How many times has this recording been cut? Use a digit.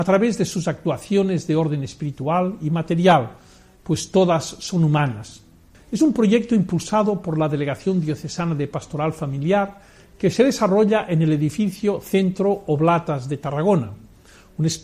1